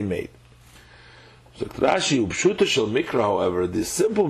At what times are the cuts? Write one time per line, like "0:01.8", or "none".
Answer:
none